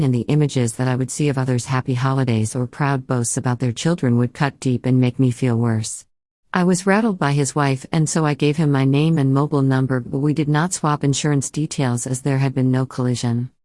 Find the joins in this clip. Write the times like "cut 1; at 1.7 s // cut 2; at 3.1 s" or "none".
cut 1; at 6.3 s